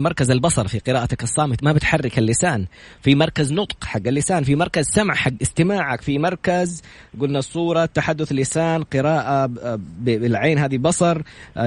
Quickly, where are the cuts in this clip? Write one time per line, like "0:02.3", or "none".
0:01.6